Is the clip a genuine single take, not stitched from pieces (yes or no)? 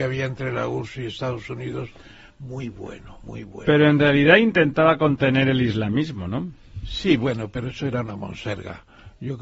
yes